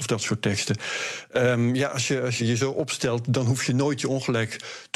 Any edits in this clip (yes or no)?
yes